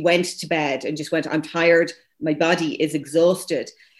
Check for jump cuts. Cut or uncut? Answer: uncut